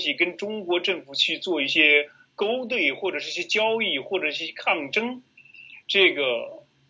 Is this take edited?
no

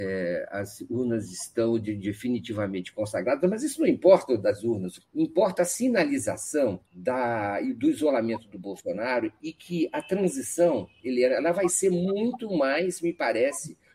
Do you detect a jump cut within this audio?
yes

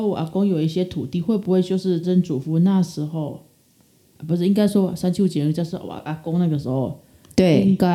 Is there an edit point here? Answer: yes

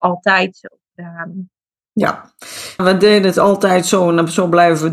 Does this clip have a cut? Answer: yes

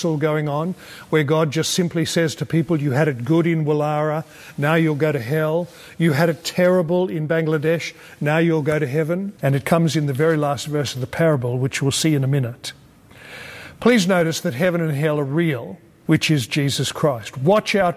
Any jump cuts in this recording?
yes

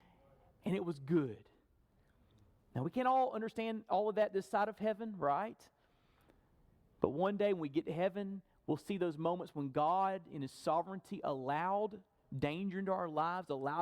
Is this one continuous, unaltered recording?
yes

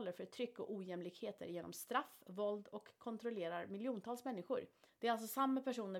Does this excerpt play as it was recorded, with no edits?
no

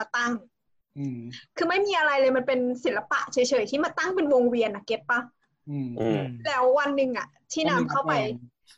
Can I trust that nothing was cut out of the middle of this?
yes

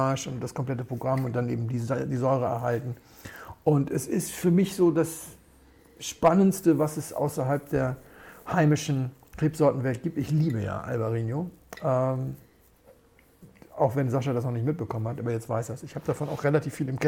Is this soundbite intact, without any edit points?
yes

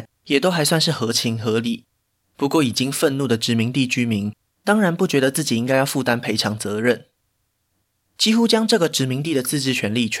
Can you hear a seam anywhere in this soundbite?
yes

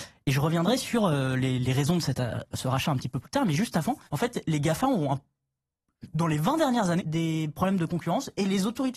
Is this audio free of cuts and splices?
no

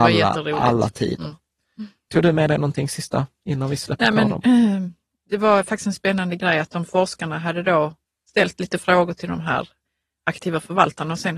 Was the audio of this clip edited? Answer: no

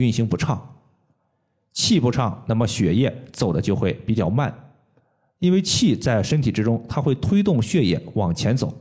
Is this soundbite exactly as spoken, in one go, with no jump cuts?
yes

